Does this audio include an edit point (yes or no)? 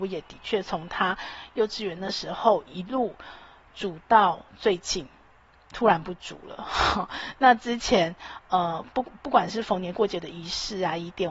no